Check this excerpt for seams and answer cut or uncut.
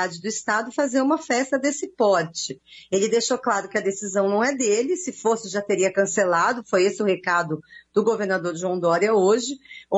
uncut